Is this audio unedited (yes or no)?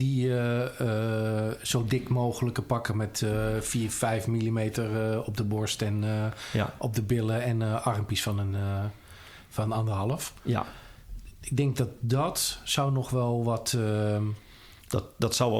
yes